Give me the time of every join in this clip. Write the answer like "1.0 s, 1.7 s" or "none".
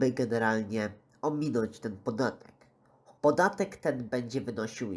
3.2 s